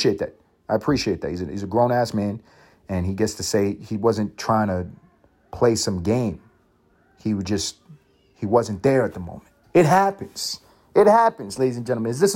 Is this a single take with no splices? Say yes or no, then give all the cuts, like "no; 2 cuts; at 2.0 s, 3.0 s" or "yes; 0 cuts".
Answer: yes; 0 cuts